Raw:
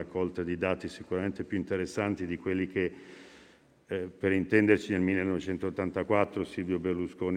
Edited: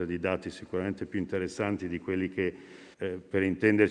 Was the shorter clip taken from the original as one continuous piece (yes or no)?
no